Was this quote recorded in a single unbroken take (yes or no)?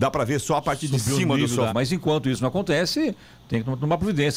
no